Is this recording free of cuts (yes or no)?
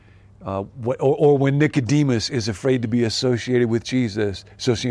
yes